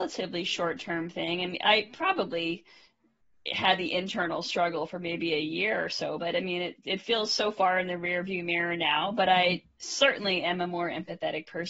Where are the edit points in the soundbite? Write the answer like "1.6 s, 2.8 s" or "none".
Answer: none